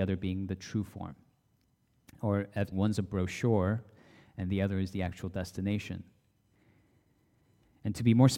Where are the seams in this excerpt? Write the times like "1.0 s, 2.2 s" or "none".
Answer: 2.7 s